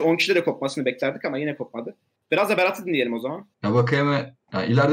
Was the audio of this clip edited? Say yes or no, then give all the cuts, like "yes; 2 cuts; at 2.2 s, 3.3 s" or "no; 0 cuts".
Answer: yes; 1 cut; at 3.5 s